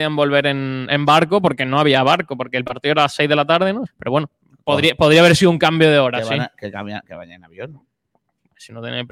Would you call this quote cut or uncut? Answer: cut